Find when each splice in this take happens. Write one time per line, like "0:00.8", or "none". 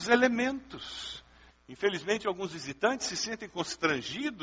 0:01.5